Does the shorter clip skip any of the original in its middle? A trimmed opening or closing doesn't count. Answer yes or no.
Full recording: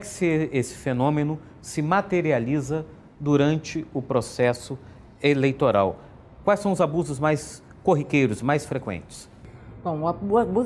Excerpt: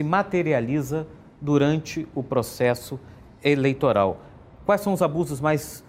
no